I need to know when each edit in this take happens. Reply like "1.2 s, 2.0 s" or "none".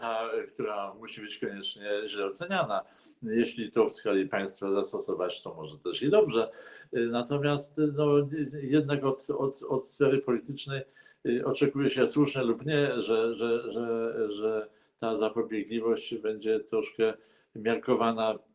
none